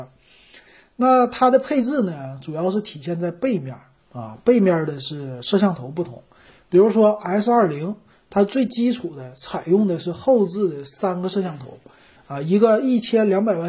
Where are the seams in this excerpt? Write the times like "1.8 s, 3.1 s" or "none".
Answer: none